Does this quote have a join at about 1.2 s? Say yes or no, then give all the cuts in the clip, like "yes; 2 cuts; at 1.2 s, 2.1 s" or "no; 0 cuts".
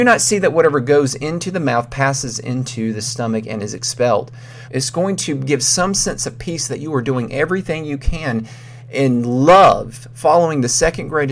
no; 1 cut; at 4.7 s